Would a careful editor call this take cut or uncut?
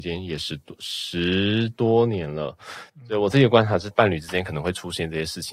cut